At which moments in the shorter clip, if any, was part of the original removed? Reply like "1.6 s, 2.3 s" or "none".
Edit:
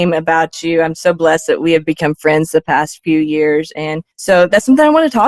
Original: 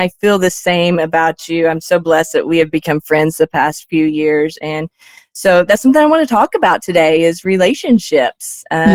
4.1 s